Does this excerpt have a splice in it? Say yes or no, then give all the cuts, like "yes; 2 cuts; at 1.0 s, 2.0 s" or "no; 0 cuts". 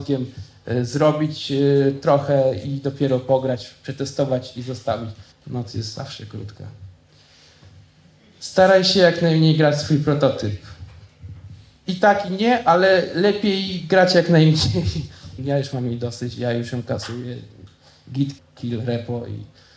yes; 3 cuts; at 5.3 s, 15.4 s, 18.4 s